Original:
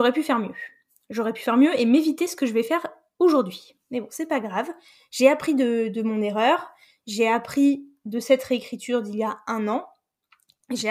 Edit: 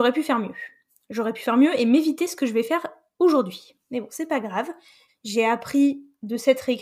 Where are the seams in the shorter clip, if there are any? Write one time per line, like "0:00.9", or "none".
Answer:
0:05.1